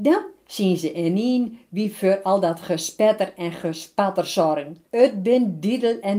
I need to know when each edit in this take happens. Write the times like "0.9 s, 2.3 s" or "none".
4.9 s